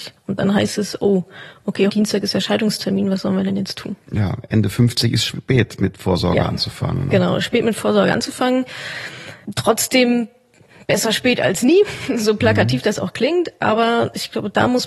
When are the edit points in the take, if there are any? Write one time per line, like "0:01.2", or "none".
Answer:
0:01.9

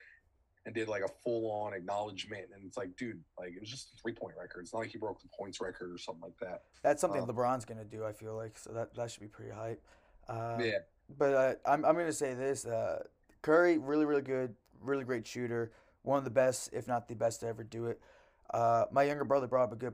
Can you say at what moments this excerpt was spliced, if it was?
none

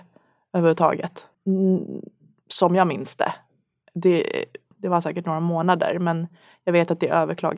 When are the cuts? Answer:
0:01.3
0:04.7

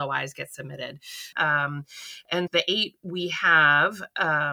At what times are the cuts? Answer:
0:01.3
0:02.5

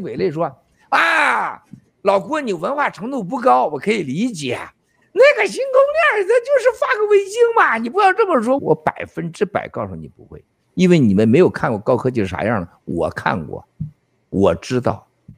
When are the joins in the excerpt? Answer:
0:08.6

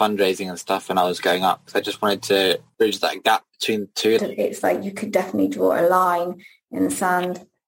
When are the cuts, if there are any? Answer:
0:04.2

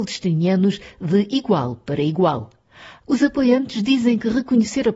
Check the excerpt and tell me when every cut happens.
0:03.0

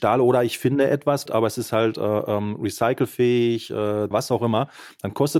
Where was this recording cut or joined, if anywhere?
0:01.3
0:04.1

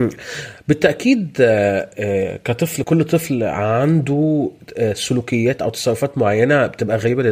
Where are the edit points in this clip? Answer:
0:02.8

